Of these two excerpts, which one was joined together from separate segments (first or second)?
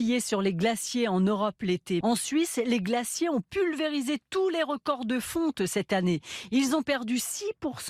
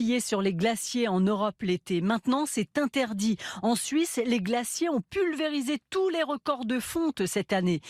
first